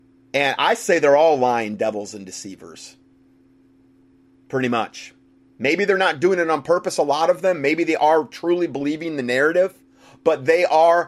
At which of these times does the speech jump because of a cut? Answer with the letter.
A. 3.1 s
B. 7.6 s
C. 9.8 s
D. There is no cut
D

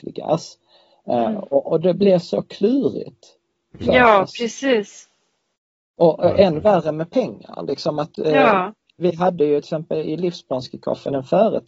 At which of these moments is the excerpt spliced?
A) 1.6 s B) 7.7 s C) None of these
A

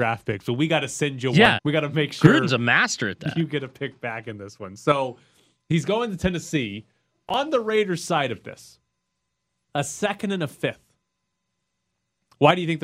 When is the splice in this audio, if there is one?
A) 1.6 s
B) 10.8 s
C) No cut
A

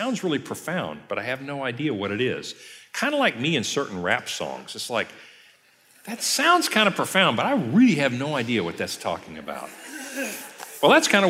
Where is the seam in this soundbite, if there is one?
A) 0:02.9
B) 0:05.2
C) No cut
C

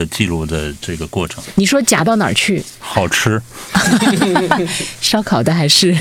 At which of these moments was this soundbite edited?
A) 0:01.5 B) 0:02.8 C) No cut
B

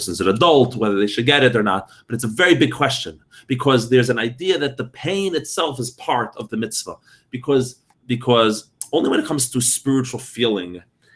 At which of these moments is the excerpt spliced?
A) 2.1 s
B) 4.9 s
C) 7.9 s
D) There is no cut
C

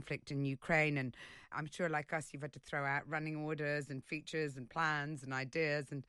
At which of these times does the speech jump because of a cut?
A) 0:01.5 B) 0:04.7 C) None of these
A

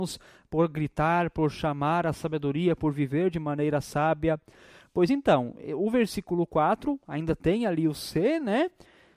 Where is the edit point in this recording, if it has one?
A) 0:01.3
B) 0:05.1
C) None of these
C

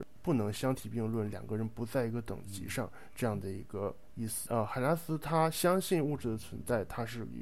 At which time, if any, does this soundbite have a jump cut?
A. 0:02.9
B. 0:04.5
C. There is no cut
B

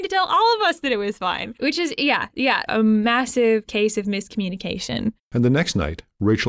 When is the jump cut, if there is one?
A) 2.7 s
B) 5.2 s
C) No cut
A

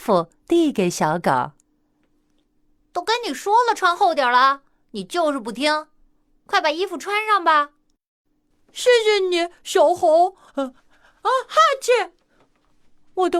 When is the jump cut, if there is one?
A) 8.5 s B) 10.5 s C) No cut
B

